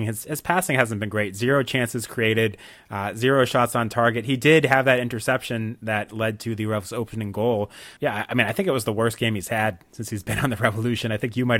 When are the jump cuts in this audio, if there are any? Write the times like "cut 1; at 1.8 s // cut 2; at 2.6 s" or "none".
cut 1; at 8.0 s